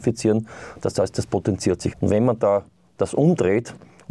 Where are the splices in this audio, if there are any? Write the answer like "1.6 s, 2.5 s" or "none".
1.9 s